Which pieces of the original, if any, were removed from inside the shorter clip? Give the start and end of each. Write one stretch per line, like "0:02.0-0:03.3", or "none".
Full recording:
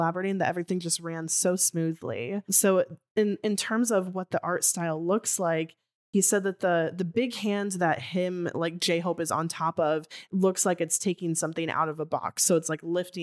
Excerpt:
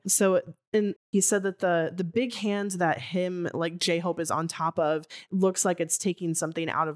0:03.4-0:06.0